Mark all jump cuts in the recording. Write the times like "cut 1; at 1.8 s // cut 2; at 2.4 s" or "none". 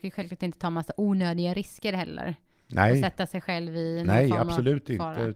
none